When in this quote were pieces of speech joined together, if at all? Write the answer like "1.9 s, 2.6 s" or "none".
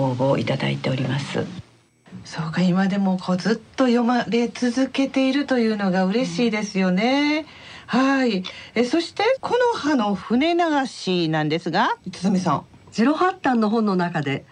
9.4 s, 12.8 s